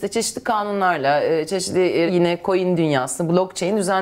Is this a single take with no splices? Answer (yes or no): no